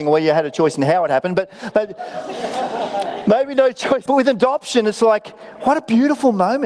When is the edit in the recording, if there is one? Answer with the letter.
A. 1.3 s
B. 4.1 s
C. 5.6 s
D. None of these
B